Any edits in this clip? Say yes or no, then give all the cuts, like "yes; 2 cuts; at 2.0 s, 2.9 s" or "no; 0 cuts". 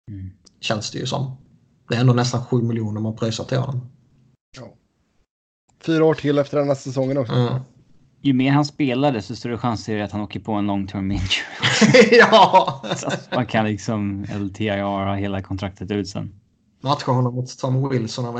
yes; 1 cut; at 7.3 s